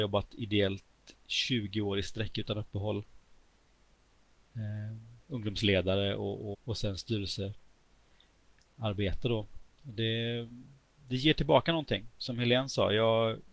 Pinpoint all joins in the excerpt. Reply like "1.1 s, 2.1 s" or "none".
6.5 s